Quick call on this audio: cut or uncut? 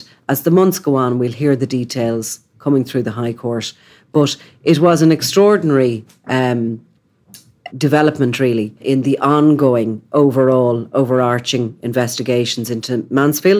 cut